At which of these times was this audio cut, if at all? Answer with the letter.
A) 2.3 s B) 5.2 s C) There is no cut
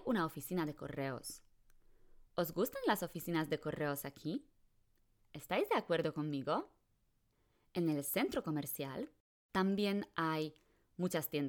B